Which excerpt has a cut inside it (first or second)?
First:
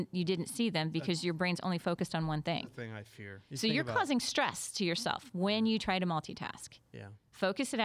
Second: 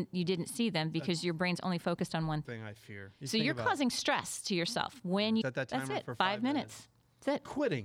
second